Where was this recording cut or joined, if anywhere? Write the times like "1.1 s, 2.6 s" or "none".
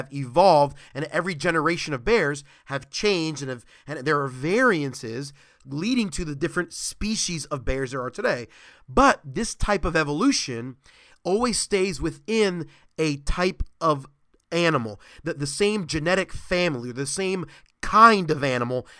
none